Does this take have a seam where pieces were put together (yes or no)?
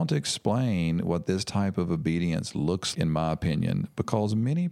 yes